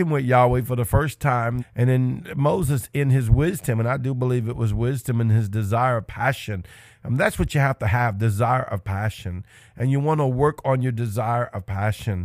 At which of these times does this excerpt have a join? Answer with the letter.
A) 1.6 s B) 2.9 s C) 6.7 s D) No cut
A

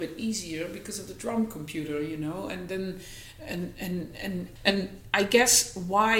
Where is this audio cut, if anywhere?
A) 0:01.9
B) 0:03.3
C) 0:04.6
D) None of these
C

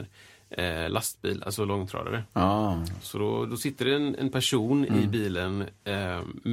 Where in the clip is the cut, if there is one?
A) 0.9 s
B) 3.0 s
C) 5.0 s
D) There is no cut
D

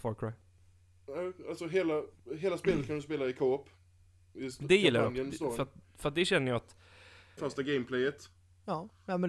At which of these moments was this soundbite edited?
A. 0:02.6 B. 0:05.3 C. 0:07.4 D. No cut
C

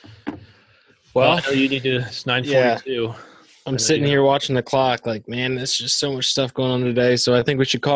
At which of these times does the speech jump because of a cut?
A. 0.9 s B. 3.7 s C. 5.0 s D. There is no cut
D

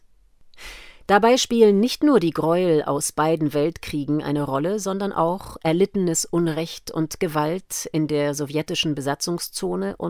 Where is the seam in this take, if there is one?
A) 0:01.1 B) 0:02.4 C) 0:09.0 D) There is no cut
A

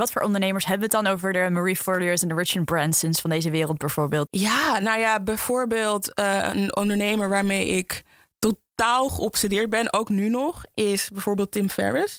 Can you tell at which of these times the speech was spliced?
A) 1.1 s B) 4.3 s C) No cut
B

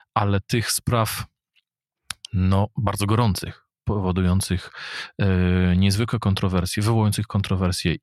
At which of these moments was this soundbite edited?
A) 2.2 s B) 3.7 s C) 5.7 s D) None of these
D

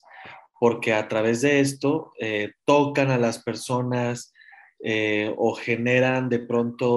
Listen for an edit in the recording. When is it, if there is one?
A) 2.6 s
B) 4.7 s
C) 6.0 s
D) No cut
D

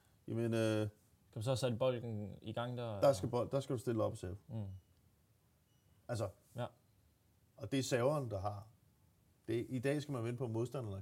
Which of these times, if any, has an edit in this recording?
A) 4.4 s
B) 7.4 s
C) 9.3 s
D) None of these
D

